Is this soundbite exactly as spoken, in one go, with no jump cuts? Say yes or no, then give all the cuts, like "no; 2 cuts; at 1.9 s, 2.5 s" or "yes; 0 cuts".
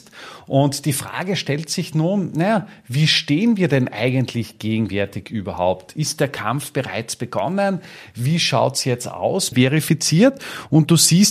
no; 1 cut; at 9.5 s